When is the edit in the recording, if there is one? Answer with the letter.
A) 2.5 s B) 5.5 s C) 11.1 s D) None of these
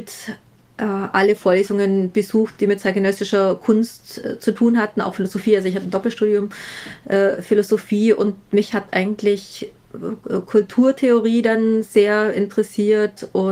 D